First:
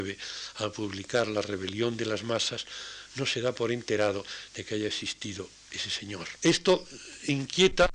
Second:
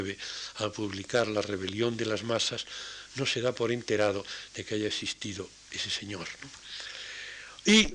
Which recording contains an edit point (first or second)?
first